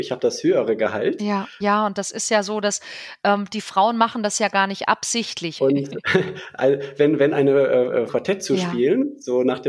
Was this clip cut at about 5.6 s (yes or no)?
yes